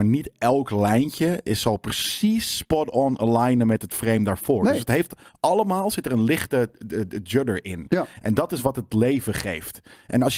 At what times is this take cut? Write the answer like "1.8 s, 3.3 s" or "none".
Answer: none